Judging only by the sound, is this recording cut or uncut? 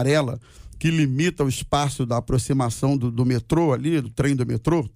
cut